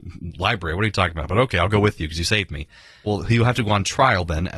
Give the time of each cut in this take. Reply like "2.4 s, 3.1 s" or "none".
3.1 s